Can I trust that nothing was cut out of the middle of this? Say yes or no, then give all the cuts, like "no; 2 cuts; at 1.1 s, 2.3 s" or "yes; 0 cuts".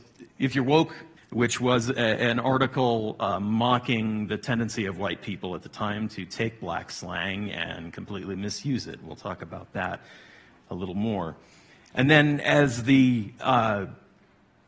no; 1 cut; at 1.2 s